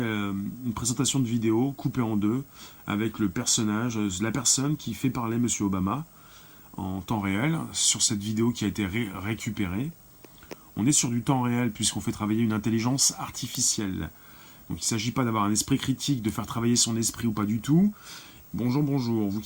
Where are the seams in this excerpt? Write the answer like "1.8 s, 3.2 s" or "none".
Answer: 18.4 s